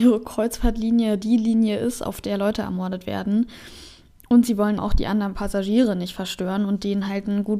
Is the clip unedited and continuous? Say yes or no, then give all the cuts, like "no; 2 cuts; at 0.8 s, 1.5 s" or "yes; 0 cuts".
no; 1 cut; at 4.8 s